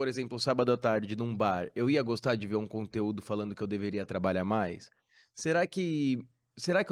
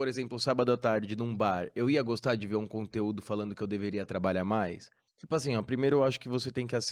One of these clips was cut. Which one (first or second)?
second